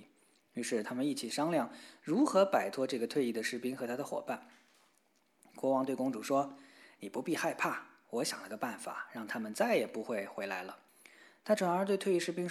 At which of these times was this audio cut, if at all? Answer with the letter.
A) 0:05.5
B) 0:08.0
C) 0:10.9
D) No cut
C